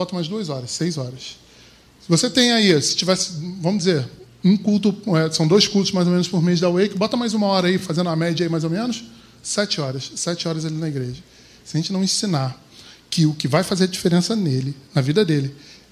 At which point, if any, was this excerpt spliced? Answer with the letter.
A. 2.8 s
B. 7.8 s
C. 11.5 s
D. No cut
D